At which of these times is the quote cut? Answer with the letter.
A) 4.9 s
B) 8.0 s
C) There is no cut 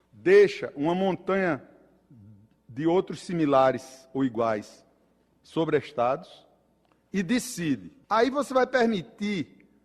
B